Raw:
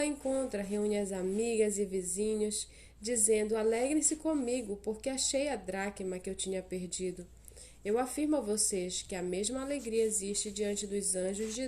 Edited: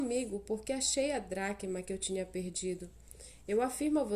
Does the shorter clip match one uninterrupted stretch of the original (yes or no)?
yes